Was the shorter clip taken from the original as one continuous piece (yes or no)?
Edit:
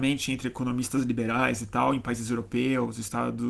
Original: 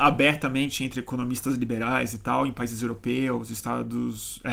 yes